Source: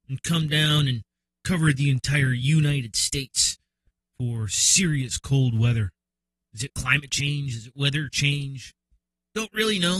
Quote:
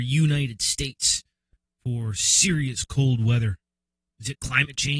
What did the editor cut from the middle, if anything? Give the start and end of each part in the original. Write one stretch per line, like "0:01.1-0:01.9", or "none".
none